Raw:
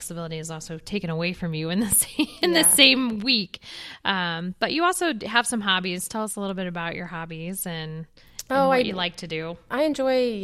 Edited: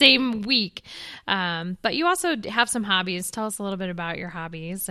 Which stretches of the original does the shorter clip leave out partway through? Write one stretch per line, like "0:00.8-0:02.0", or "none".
none